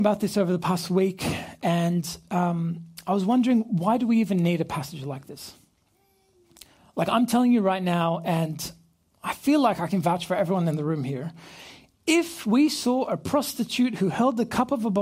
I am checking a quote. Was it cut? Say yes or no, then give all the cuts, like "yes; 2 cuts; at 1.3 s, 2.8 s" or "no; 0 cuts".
no; 0 cuts